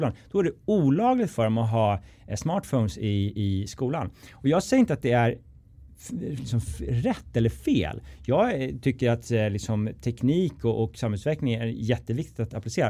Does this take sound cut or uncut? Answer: uncut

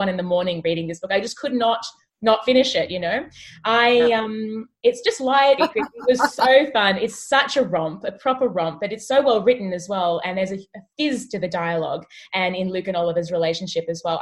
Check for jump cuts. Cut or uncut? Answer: cut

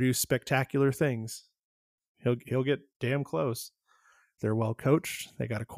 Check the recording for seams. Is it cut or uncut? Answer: cut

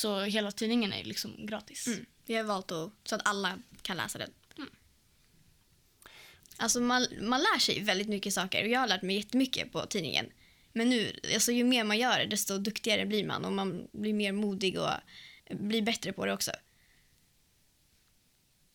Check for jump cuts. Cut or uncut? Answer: cut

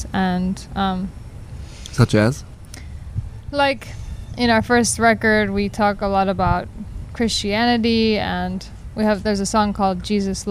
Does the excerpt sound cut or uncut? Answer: uncut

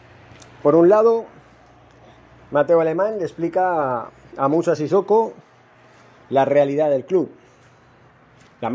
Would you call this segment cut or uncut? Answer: uncut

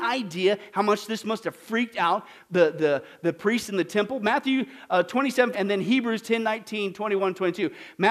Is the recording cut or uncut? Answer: cut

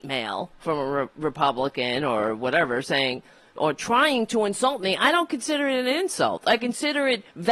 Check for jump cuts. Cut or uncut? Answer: uncut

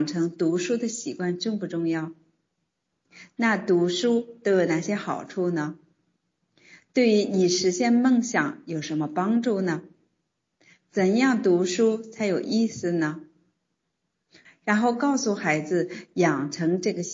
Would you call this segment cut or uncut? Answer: cut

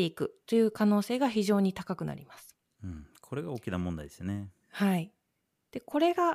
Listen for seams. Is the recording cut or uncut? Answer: uncut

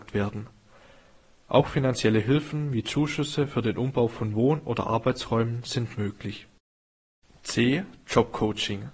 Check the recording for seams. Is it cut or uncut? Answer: uncut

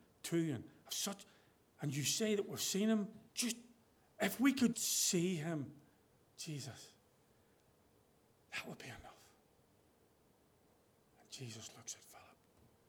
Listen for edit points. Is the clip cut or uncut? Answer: cut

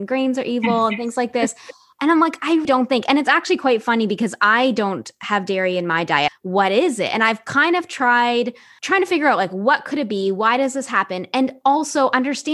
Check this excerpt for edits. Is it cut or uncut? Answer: cut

